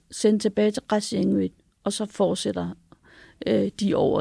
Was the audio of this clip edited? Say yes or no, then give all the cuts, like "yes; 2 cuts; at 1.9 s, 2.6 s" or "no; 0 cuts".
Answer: no; 0 cuts